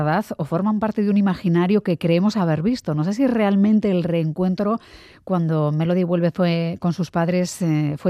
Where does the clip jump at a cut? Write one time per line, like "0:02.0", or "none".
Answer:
none

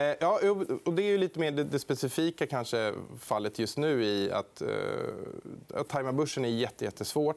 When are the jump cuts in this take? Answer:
none

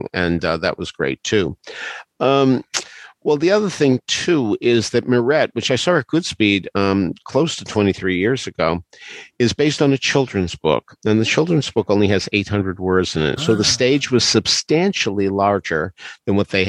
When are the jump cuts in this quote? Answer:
0:13.4

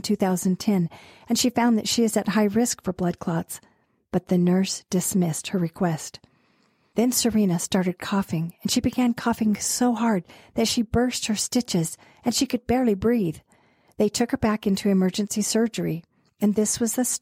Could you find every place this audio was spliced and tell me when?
none

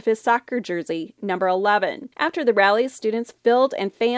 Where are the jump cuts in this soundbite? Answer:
0:02.1

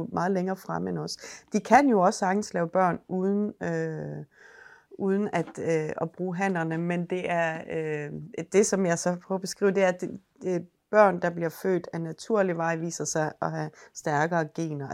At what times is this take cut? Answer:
none

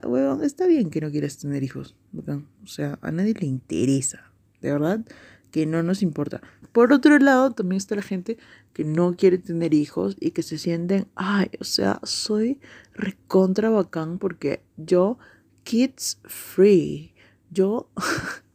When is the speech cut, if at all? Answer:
0:06.6

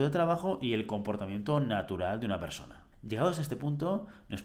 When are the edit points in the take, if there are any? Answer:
0:02.9

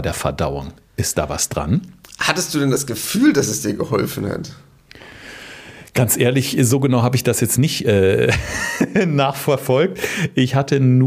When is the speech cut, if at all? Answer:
none

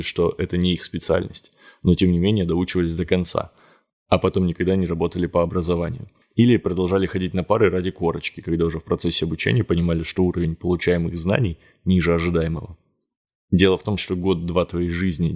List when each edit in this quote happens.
0:14.0

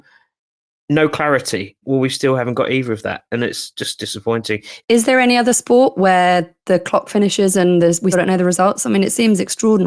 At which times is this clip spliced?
0:01.8
0:04.8
0:08.1

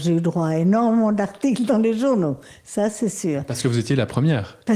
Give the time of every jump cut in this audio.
none

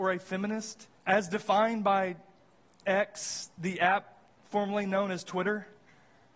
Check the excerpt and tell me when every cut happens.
0:01.0

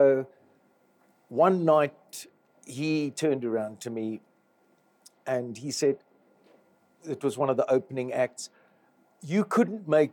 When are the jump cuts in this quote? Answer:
none

